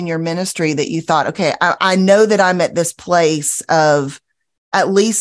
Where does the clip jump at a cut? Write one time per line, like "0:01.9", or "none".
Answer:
0:01.8

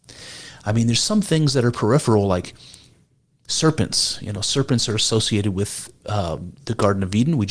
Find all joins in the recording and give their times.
none

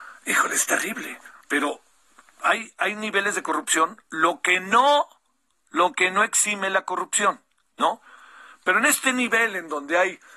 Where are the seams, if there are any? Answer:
0:01.4

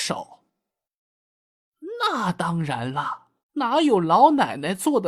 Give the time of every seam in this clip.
0:03.4

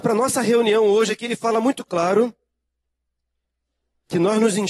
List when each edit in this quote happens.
none

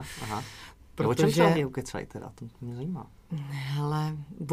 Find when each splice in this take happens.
none

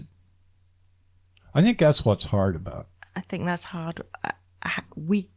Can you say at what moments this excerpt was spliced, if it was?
0:03.0

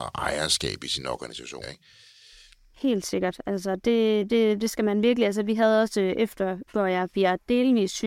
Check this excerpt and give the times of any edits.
0:01.6
0:06.7

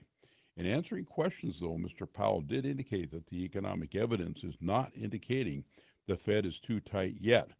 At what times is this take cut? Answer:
none

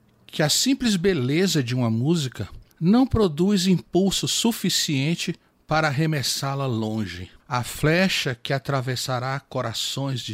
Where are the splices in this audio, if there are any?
0:02.7
0:07.4

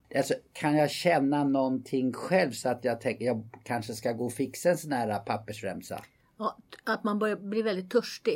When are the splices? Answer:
none

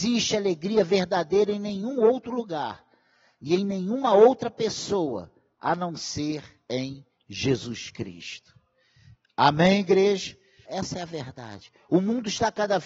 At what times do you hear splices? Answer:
0:10.6

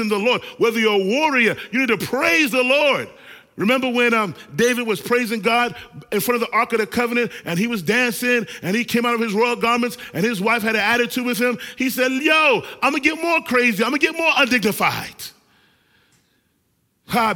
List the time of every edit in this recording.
none

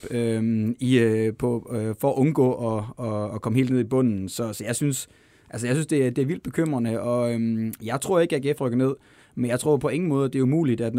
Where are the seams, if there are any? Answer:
none

